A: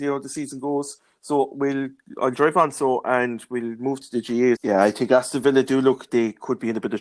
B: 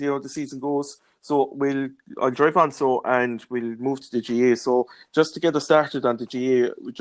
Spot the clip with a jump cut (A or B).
A